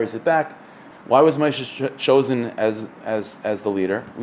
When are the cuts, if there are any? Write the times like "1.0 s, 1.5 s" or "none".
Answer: 0.9 s